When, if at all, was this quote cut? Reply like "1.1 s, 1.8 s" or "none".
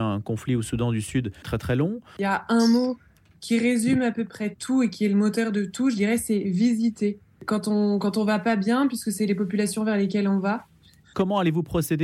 11.0 s